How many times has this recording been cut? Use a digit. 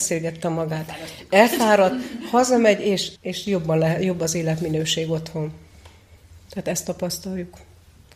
1